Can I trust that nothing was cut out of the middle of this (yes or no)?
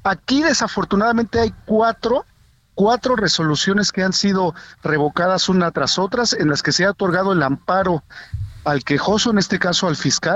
yes